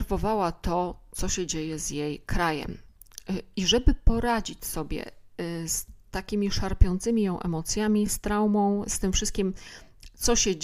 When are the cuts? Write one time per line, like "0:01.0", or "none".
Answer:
none